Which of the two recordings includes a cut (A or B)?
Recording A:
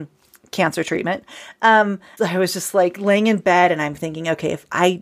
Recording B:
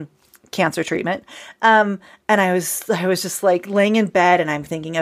A